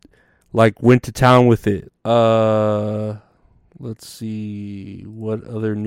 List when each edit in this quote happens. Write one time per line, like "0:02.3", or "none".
0:01.9